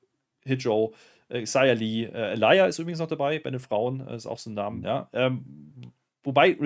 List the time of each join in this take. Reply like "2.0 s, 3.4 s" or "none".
4.8 s